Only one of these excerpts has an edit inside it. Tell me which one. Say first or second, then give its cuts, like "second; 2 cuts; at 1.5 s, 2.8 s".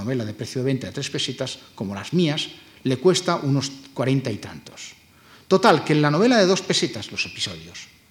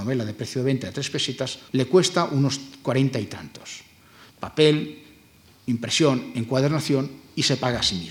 second; 2 cuts; at 1.7 s, 4.3 s